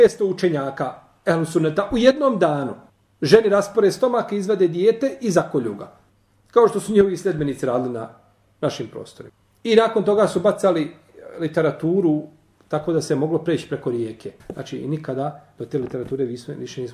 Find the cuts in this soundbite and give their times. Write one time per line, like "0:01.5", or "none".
0:14.4